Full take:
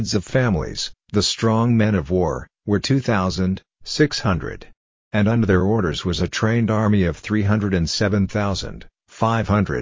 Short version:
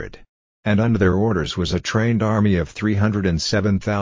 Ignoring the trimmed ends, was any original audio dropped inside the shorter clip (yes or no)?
no